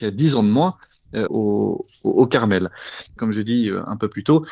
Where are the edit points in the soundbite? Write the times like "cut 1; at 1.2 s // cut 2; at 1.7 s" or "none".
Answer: cut 1; at 1.3 s // cut 2; at 3.2 s